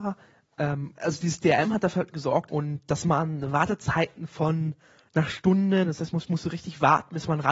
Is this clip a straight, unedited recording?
no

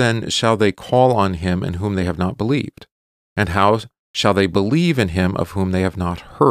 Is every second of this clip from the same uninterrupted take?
yes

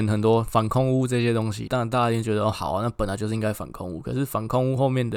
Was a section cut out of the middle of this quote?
yes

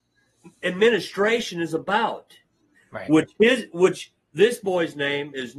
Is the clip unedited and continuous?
no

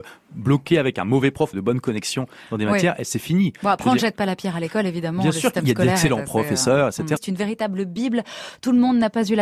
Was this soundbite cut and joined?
yes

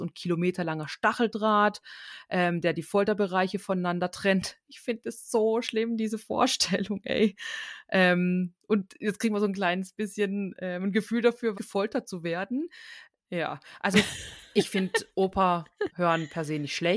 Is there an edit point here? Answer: yes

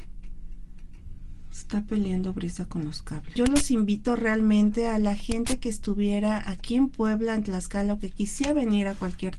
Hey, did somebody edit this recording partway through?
yes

